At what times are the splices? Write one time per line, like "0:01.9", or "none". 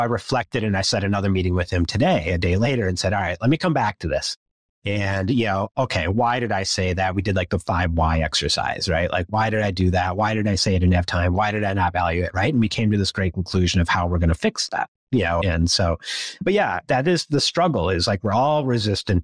none